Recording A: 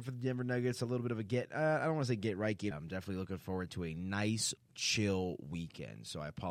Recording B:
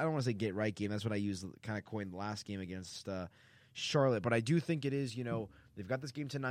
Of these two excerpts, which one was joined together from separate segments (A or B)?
A